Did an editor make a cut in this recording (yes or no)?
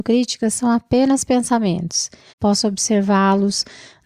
yes